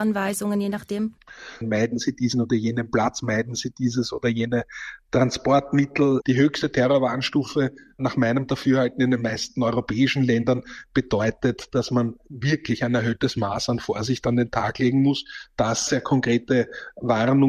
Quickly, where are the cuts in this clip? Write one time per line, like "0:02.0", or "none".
0:01.6
0:06.2
0:15.9